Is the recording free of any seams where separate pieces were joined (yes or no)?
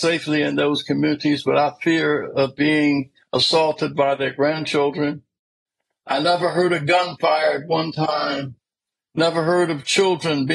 yes